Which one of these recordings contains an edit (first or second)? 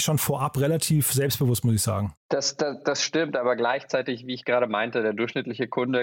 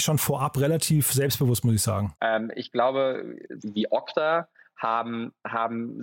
second